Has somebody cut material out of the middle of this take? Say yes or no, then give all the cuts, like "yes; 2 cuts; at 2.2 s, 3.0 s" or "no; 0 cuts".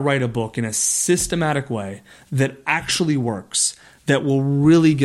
no; 0 cuts